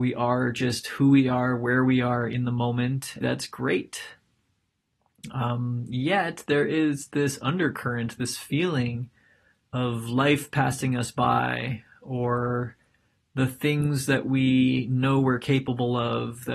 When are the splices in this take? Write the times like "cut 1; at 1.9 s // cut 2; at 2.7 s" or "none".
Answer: cut 1; at 3.2 s

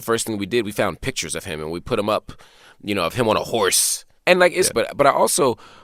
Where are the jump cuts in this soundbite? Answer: cut 1; at 4.7 s

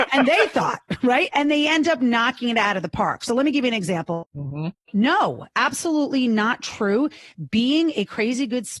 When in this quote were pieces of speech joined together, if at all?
cut 1; at 1.3 s // cut 2; at 4.2 s

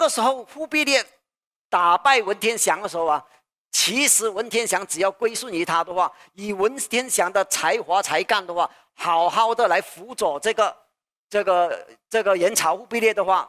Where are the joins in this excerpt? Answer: none

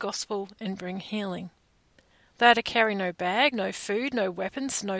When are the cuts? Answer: cut 1; at 3.5 s

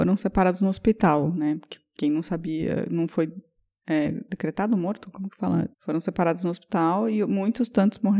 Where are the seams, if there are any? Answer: cut 1; at 4.3 s // cut 2; at 5.7 s

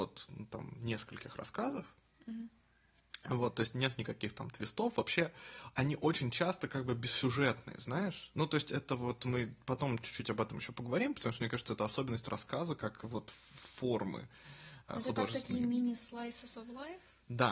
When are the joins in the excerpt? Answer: none

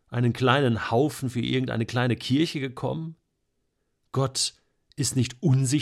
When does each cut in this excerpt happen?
none

